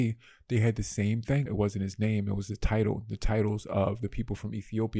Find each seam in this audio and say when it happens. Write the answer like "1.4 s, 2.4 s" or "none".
1.5 s